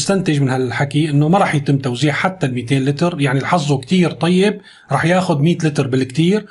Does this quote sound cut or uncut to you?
uncut